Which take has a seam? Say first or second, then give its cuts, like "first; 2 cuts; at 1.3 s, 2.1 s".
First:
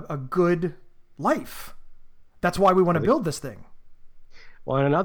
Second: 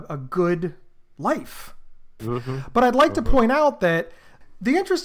second; 1 cut; at 2.2 s